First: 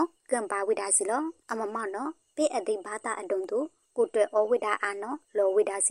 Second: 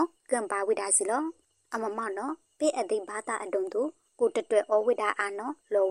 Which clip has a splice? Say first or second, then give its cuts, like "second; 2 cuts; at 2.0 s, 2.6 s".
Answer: first; 2 cuts; at 1.4 s, 4.1 s